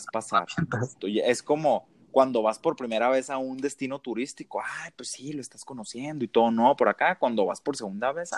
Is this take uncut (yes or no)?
no